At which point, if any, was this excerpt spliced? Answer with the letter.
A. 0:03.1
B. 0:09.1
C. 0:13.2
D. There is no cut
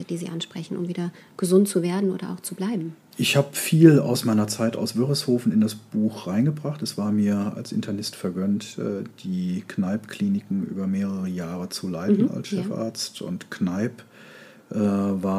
A